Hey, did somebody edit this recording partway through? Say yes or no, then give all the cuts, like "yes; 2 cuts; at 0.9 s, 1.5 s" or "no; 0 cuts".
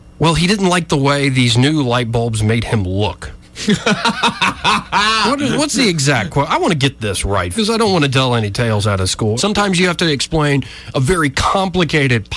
yes; 2 cuts; at 7.5 s, 9.4 s